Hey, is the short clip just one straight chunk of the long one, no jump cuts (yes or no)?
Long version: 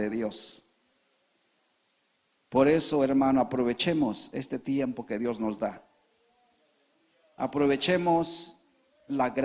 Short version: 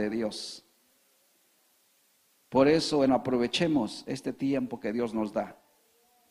no